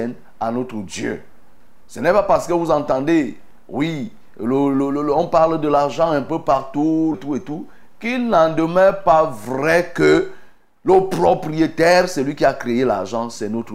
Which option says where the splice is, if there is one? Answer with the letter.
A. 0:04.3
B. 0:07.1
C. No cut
B